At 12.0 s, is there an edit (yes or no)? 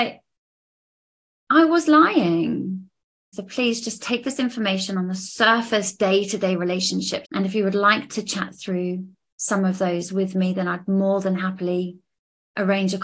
no